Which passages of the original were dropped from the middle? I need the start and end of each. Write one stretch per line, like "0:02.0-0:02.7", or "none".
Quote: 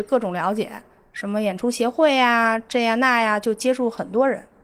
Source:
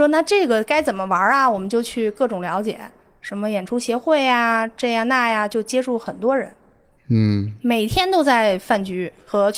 none